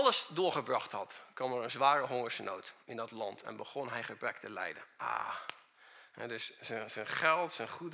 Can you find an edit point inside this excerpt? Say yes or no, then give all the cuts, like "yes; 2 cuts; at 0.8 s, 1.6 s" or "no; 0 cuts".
no; 0 cuts